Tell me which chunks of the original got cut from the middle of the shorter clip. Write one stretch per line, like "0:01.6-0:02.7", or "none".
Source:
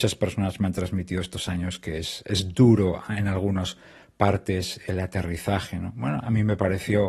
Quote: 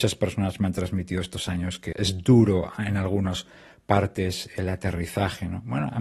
0:01.9-0:02.2